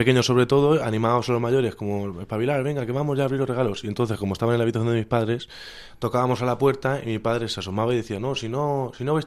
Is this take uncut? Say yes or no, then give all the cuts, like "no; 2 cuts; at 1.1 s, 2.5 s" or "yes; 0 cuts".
yes; 0 cuts